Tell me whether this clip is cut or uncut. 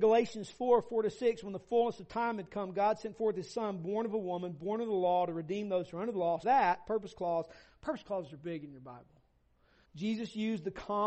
cut